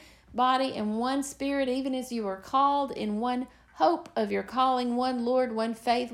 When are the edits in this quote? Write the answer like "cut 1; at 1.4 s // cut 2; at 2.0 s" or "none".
none